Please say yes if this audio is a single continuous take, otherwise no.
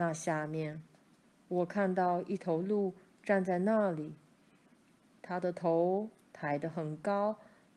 yes